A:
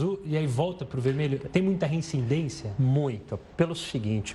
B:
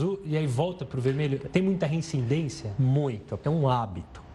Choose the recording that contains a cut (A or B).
B